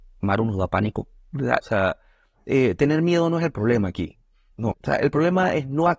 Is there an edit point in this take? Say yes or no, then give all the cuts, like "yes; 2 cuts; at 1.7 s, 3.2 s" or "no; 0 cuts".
yes; 2 cuts; at 1.6 s, 4.7 s